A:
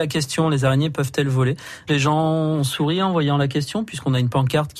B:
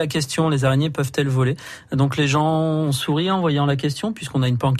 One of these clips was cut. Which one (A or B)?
A